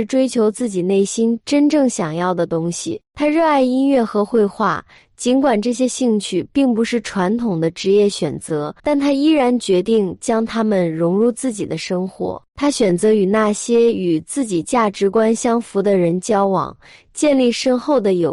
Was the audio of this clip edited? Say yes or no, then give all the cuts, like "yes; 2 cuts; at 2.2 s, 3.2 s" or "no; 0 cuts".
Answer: yes; 2 cuts; at 8.8 s, 12.5 s